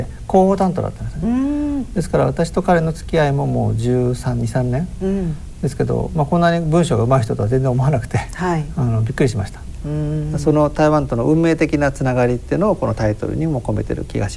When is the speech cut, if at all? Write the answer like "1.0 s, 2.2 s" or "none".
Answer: 9.8 s